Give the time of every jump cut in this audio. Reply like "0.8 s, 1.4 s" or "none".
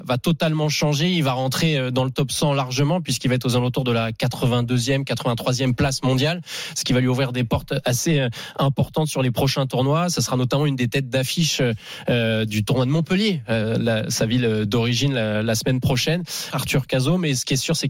16.5 s